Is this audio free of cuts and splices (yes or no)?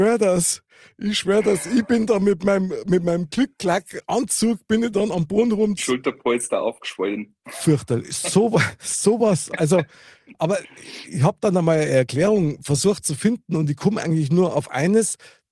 no